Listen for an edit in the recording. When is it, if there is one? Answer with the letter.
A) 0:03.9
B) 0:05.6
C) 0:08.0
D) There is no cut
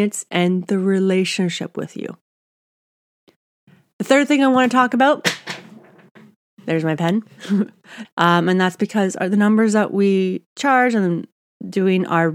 C